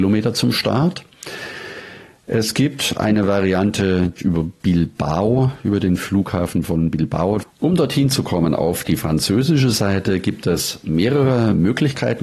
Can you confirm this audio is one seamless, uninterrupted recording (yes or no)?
no